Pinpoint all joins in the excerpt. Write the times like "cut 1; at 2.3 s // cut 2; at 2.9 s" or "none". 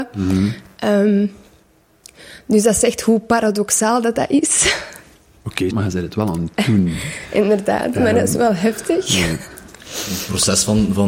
cut 1; at 5.7 s